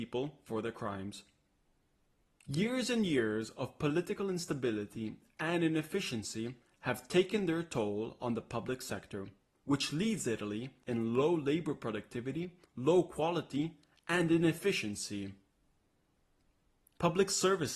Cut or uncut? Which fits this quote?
uncut